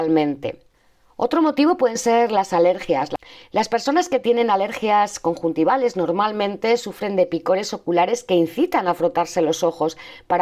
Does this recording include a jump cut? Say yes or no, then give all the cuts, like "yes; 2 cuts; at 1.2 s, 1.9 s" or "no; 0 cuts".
no; 0 cuts